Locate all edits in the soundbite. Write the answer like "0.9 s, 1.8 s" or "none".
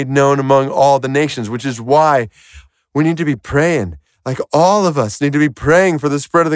2.7 s